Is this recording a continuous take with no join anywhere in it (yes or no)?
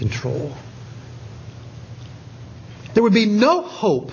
no